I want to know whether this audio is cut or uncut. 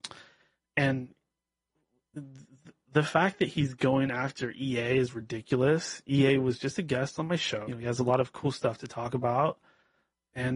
cut